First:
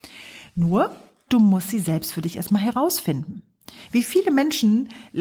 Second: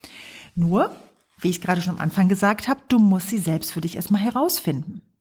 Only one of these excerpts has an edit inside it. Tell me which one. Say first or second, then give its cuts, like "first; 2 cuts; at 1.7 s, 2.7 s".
first; 1 cut; at 1.3 s